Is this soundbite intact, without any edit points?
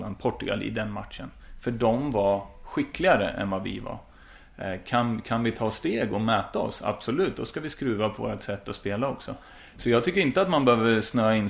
yes; 0 cuts

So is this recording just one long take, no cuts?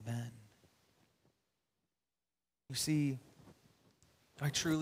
yes; 0 cuts

